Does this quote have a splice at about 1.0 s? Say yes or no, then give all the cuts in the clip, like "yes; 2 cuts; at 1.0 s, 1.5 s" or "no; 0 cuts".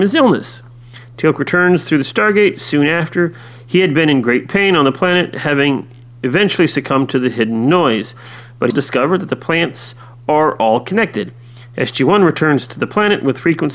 no; 1 cut; at 8.7 s